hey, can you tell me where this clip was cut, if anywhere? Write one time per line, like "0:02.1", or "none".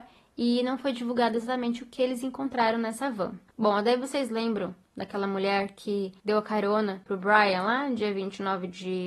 none